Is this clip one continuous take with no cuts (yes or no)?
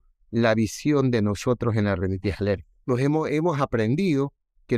no